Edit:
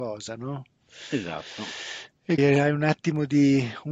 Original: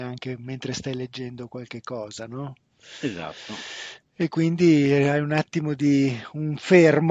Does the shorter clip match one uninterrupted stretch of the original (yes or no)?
no